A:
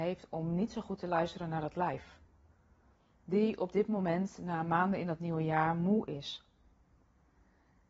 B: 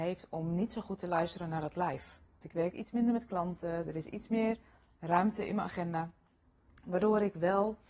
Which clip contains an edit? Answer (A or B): B